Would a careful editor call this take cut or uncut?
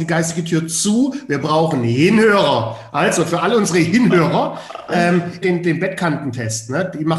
cut